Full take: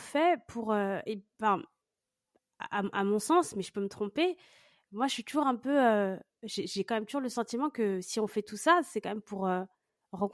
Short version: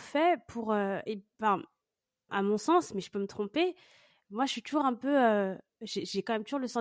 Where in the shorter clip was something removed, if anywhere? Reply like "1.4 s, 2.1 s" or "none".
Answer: 2.3 s